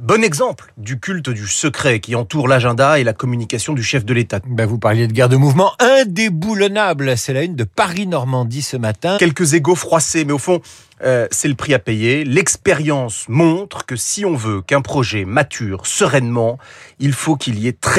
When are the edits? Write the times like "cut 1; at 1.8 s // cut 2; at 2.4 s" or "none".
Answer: cut 1; at 4.4 s // cut 2; at 9.2 s